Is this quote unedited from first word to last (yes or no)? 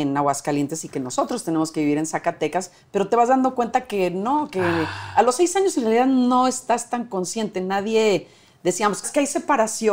no